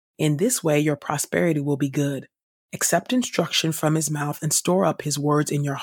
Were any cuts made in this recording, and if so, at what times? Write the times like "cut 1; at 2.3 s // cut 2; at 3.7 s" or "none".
none